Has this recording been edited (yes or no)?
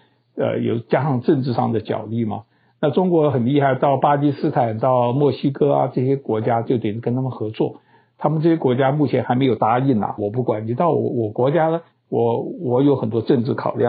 yes